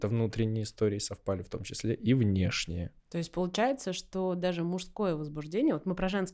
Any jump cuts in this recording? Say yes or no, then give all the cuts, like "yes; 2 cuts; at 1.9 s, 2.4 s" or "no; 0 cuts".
yes; 1 cut; at 3.0 s